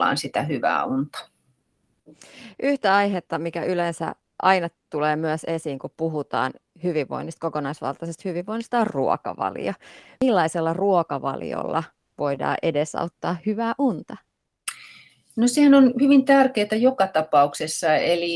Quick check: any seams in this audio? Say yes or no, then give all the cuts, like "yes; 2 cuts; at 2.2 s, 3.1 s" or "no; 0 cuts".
no; 0 cuts